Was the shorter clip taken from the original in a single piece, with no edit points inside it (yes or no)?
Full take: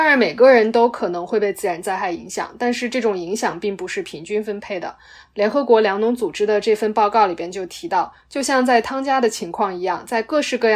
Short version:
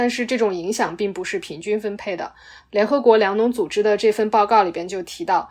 yes